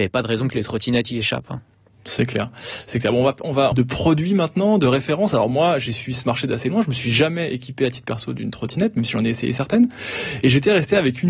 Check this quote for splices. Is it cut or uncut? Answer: cut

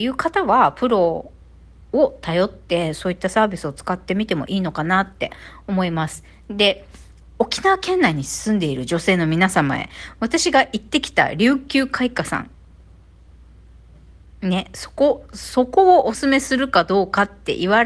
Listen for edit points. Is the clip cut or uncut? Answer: cut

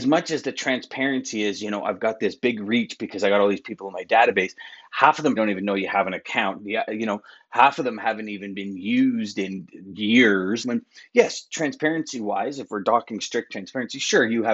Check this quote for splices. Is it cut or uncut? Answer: cut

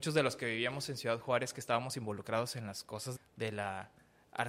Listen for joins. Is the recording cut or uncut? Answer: cut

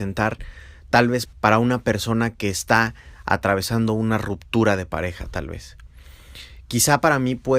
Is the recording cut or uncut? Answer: cut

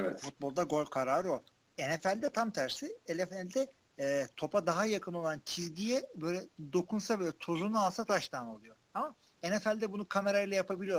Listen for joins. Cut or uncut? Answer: cut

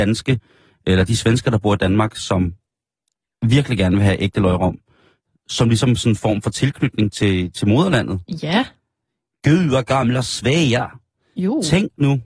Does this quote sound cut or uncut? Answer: uncut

